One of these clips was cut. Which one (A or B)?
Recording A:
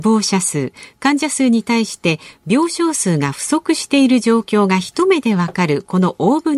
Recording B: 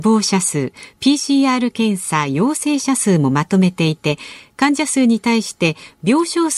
A